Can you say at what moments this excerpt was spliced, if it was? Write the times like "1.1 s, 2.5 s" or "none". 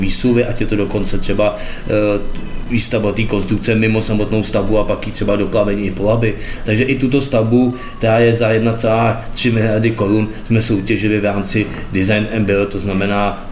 6.6 s